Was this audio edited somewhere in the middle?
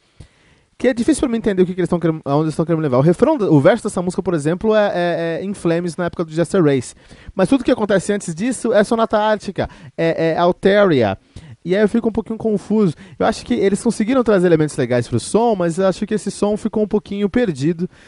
yes; 1 cut; at 11.6 s

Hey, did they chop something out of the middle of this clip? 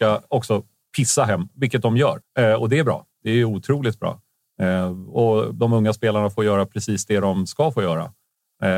yes; 1 cut; at 2.2 s

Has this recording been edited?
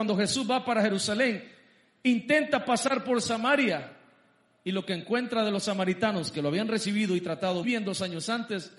yes; 1 cut; at 7.6 s

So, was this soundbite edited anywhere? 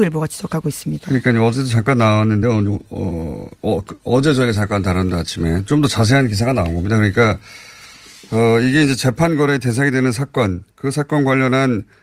no; 0 cuts

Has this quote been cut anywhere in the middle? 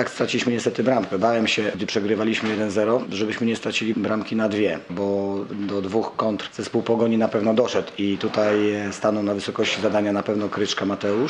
yes; 2 cuts; at 1.7 s, 4.9 s

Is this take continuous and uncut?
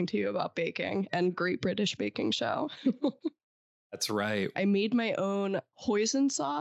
no; 1 cut; at 4.5 s

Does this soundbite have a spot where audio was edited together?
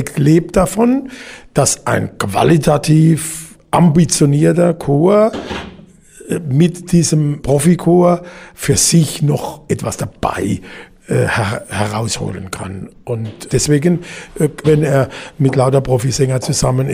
yes; 2 cuts; at 13.5 s, 14.6 s

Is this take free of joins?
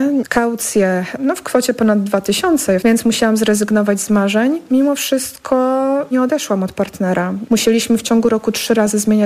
no; 1 cut; at 2.8 s

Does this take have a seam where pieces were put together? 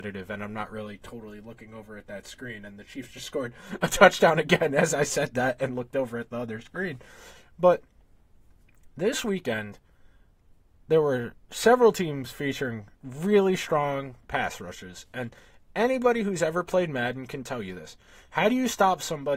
no; 0 cuts

